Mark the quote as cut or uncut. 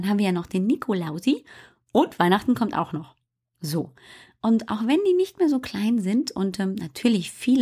uncut